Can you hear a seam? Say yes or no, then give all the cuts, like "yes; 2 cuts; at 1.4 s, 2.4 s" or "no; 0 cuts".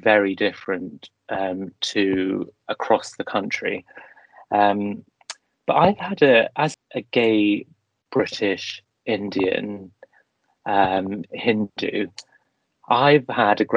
yes; 1 cut; at 6.7 s